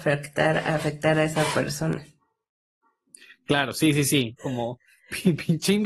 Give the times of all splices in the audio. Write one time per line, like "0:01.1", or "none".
0:04.4